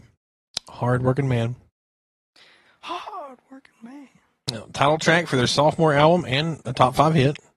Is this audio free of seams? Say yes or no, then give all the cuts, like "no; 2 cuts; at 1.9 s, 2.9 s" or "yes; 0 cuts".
yes; 0 cuts